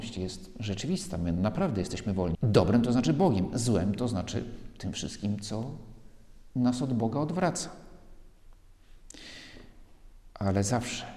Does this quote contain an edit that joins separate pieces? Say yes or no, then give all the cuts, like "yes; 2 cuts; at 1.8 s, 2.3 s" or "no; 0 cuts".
yes; 1 cut; at 2.3 s